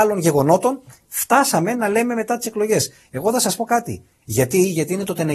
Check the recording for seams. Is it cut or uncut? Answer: cut